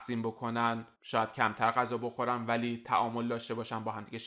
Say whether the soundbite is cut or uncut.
cut